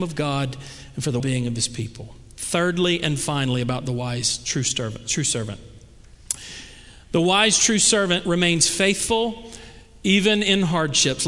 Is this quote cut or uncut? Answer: cut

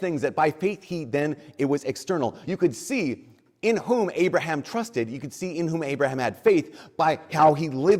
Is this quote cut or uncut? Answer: uncut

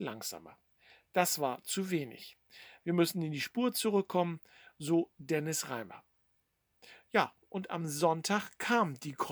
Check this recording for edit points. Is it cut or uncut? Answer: uncut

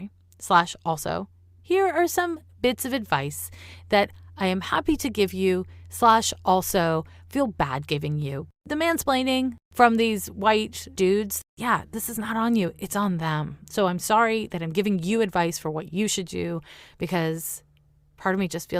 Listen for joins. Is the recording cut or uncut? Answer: uncut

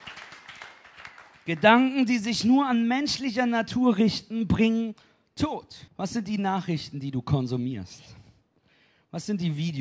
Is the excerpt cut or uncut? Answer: cut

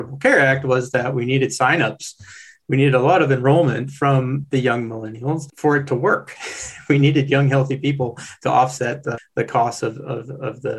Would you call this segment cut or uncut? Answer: uncut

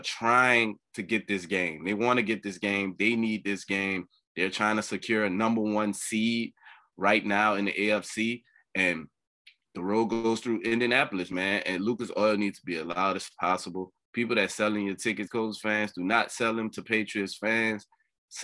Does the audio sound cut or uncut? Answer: cut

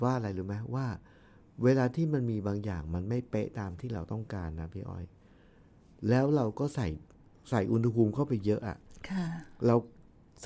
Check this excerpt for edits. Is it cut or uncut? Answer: uncut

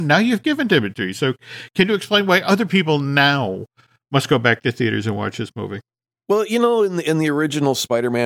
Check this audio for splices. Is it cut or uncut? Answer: uncut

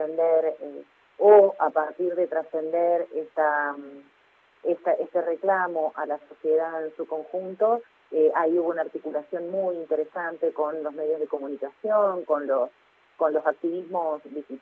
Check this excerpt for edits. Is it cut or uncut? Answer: uncut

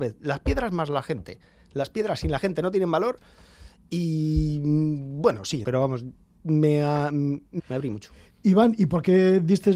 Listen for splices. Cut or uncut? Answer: cut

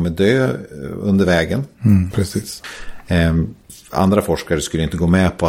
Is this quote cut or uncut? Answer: cut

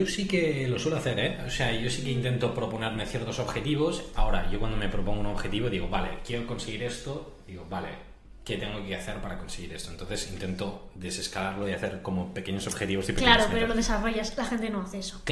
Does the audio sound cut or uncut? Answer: uncut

